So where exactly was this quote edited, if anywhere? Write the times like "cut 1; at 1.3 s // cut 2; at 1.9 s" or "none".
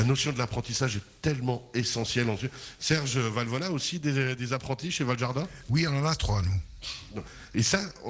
none